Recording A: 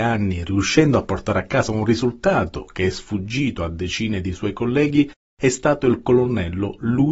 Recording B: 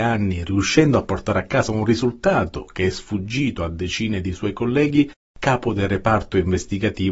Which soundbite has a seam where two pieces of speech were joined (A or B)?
B